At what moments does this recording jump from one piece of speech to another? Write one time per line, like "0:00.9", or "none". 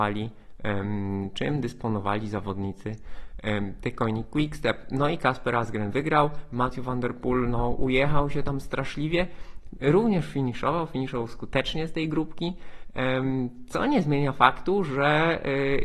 none